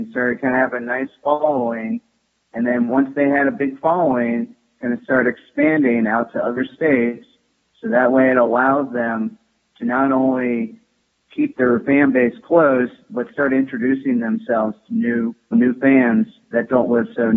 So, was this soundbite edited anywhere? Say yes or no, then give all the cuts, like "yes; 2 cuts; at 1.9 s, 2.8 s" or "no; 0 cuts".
yes; 1 cut; at 15.5 s